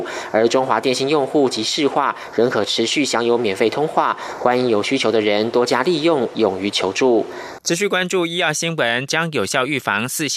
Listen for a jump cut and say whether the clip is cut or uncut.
cut